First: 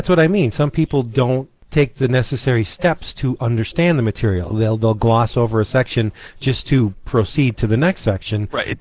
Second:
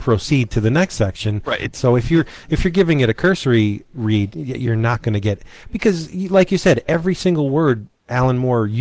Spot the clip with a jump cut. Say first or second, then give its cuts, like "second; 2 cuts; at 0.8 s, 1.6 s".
second; 1 cut; at 1.7 s